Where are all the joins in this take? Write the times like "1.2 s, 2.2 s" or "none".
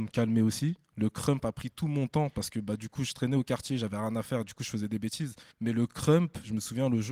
5.5 s